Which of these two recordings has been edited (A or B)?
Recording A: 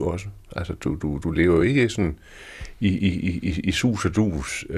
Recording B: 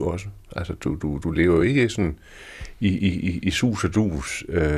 B